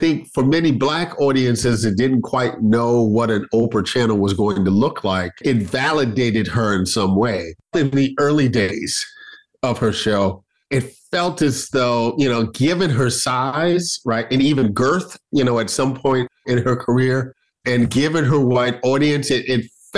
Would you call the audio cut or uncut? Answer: cut